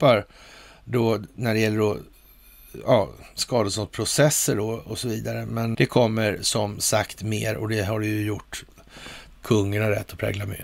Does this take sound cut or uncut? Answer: cut